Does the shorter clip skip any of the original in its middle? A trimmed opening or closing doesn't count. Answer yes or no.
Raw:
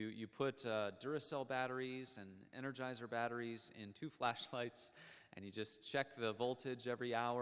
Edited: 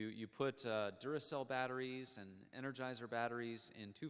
no